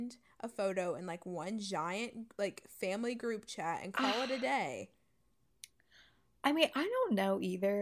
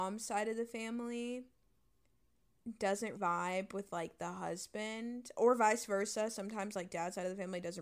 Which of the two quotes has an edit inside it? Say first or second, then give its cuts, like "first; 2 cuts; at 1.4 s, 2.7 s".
second; 1 cut; at 3.2 s